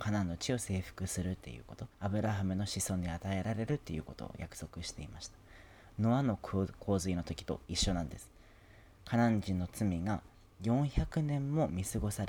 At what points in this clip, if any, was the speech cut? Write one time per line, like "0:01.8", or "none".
0:01.9